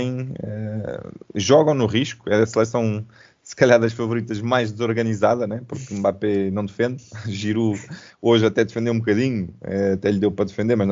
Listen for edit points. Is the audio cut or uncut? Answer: uncut